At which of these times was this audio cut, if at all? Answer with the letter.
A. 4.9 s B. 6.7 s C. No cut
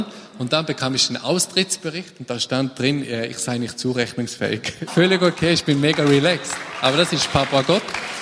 A